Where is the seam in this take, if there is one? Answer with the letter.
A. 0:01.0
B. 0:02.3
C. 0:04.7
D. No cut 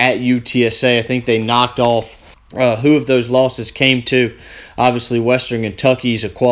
B